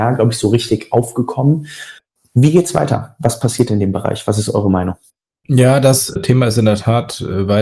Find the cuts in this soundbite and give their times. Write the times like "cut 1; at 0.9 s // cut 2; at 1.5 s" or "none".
none